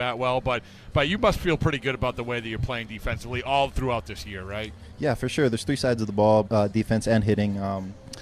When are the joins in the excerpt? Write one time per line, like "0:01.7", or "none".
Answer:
0:06.5